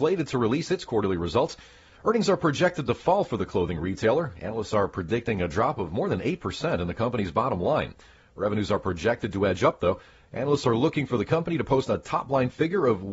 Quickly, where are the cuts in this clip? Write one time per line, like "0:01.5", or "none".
none